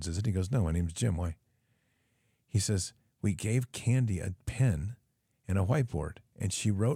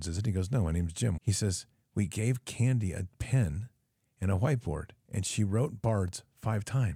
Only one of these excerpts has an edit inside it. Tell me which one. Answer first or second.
second